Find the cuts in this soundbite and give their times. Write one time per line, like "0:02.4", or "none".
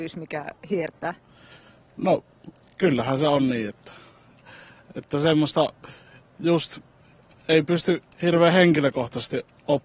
none